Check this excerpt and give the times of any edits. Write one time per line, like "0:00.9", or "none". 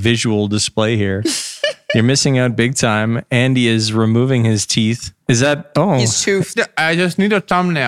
0:05.2
0:06.6